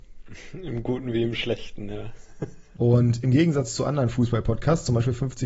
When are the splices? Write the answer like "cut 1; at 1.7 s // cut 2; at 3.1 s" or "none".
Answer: cut 1; at 2.8 s